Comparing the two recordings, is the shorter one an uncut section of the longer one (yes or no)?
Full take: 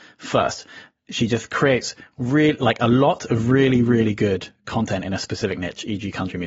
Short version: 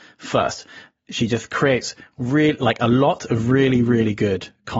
yes